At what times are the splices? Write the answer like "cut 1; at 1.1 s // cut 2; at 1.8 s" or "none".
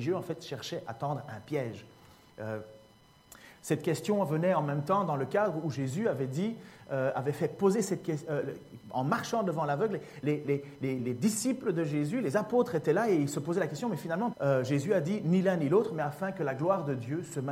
cut 1; at 11.0 s // cut 2; at 14.3 s